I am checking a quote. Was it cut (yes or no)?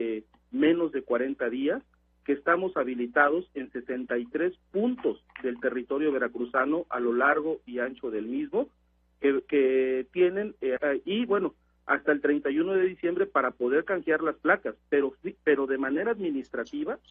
yes